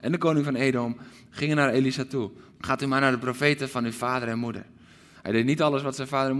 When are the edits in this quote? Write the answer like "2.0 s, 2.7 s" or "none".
2.6 s, 5.1 s